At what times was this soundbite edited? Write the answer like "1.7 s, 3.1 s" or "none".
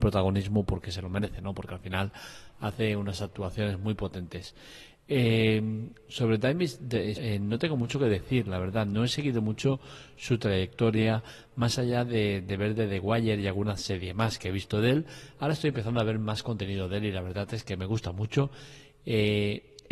7.2 s